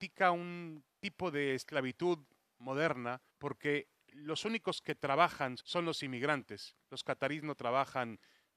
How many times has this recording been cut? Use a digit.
2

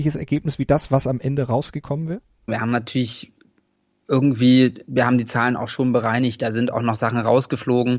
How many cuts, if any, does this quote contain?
1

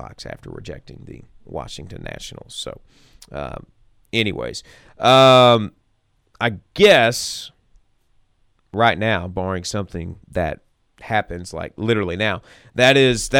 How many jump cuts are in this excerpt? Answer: 1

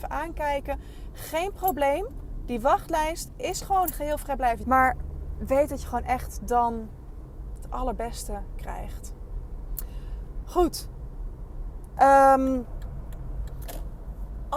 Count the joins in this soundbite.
2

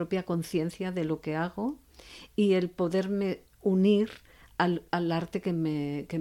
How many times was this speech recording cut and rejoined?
0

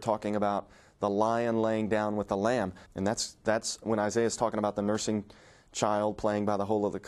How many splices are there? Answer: 1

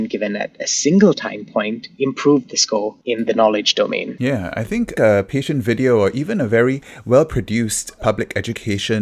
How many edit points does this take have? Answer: 1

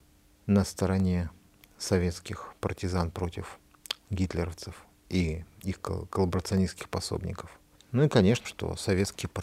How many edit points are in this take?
1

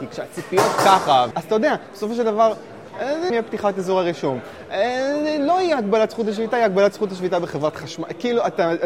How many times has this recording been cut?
2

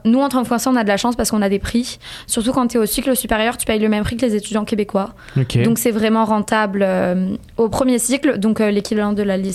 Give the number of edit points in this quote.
0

